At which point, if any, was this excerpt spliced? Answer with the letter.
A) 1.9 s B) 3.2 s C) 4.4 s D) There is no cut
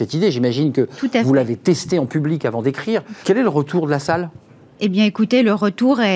B